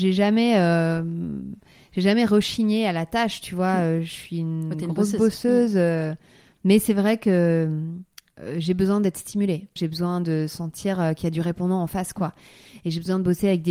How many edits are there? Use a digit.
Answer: 1